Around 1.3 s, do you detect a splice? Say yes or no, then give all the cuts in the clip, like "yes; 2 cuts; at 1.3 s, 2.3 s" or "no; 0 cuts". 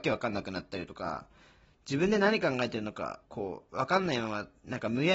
no; 1 cut; at 3.2 s